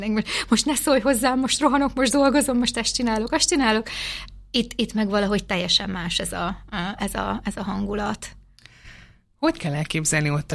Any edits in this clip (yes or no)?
yes